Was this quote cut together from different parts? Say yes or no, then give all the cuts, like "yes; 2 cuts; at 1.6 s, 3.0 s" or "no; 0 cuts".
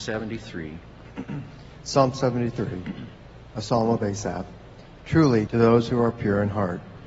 yes; 1 cut; at 5.5 s